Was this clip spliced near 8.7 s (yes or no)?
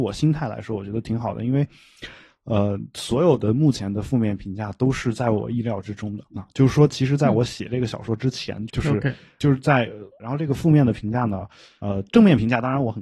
yes